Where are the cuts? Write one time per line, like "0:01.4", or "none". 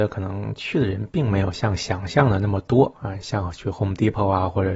0:02.9